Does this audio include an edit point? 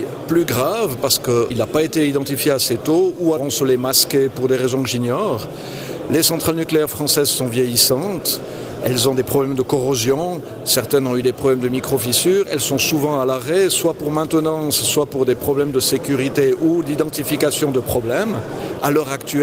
yes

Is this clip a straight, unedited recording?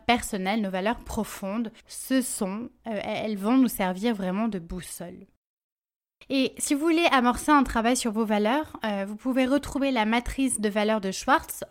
yes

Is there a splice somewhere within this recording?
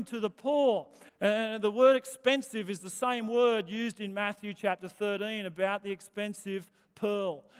yes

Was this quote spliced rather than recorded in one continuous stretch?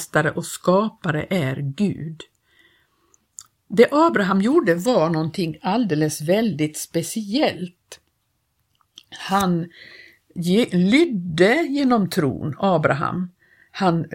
no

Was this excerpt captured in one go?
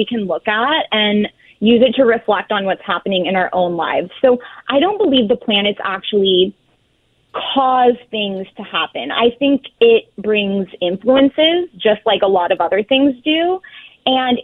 yes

